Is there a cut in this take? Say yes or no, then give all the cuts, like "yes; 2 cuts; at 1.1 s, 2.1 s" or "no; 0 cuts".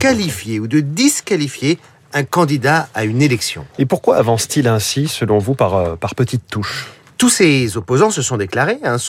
no; 0 cuts